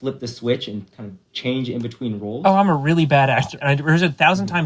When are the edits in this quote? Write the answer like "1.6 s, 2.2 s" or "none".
3.6 s

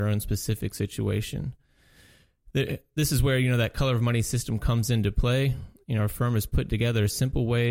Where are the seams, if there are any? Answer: none

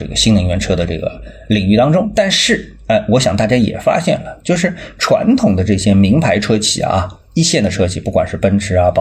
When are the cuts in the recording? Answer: none

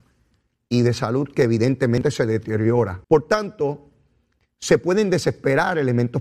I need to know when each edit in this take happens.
3.0 s

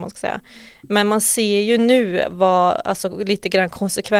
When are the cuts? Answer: none

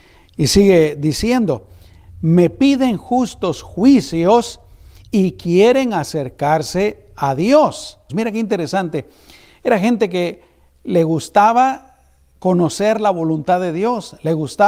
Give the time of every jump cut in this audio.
8.1 s

